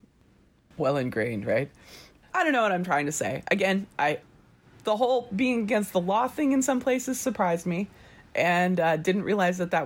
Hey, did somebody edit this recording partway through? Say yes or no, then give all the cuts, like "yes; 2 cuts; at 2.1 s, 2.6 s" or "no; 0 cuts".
yes; 1 cut; at 2.3 s